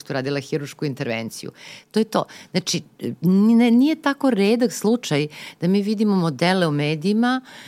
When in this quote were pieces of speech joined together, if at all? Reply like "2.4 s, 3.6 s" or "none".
none